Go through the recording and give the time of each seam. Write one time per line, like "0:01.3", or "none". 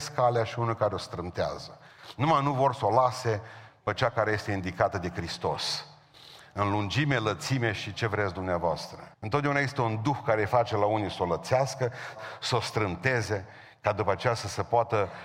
0:09.1
0:12.1